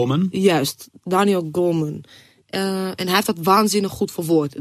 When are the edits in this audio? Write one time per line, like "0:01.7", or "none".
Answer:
0:02.4